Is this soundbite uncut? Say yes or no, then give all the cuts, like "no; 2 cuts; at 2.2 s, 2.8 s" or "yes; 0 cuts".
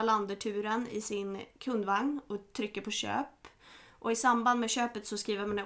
yes; 0 cuts